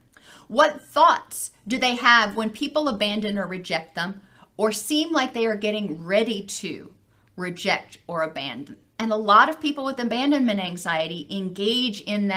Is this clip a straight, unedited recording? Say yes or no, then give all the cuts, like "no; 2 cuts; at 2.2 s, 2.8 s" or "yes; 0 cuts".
no; 1 cut; at 9.0 s